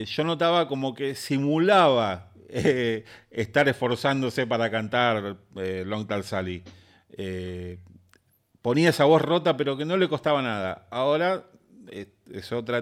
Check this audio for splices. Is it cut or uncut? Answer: uncut